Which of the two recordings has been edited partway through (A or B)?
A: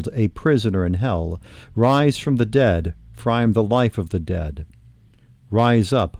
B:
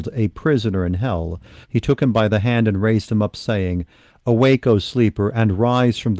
B